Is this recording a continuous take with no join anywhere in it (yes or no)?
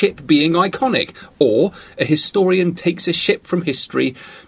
yes